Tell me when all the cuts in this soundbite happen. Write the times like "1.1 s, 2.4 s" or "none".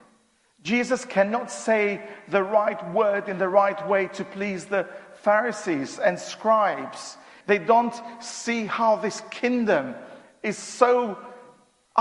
7.4 s

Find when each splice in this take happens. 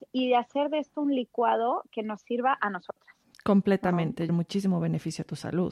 4.3 s

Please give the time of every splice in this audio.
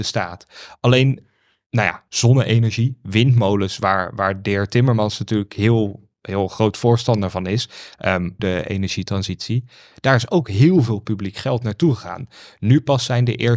8.4 s

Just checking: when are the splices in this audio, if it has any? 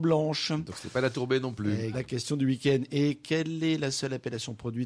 1.9 s

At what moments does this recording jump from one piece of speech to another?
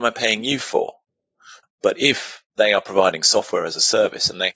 1.6 s

